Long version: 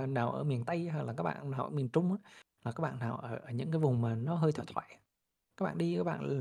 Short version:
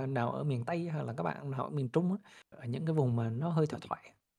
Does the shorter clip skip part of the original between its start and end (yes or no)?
yes